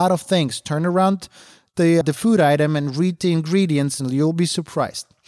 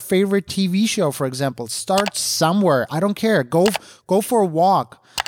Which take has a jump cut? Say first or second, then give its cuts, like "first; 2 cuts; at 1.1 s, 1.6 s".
first; 1 cut; at 2.0 s